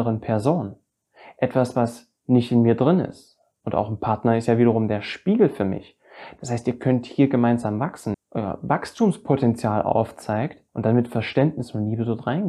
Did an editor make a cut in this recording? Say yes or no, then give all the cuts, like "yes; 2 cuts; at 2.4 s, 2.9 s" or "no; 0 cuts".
yes; 2 cuts; at 8.1 s, 10.7 s